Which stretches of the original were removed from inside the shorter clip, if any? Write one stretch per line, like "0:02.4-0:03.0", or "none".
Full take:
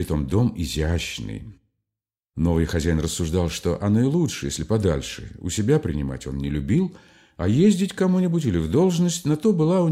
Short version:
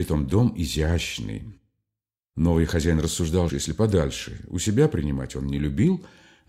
0:03.5-0:04.4